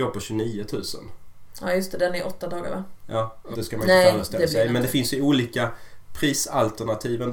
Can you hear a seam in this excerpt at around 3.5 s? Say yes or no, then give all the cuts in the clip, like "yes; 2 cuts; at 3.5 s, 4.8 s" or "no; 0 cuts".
yes; 1 cut; at 3.5 s